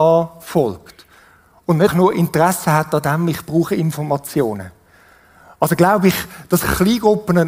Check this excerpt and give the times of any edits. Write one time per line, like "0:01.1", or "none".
0:01.9

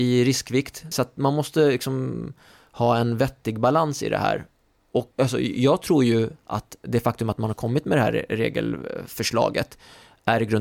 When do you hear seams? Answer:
0:00.9
0:05.1

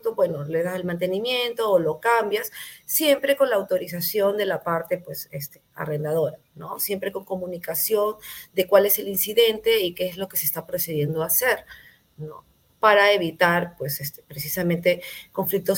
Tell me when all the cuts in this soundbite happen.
none

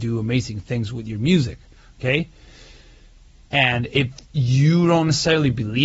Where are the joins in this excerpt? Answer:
0:03.5

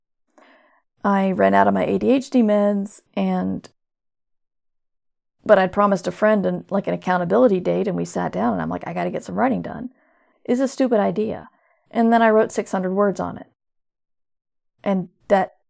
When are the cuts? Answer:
0:03.1
0:10.3

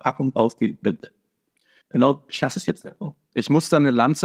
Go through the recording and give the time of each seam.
none

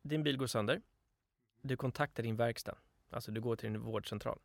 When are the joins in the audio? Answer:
none

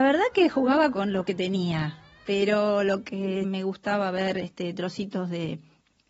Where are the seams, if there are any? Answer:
0:03.4

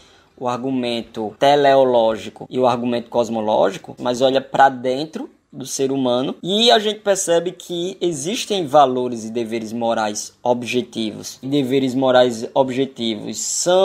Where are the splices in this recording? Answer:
0:04.0
0:11.4

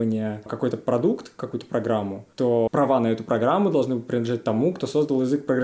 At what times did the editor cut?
none

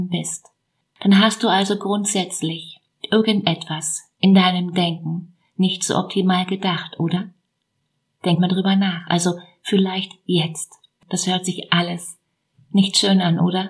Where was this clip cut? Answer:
0:11.0

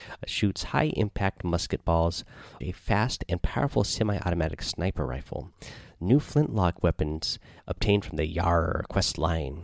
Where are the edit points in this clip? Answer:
0:02.6

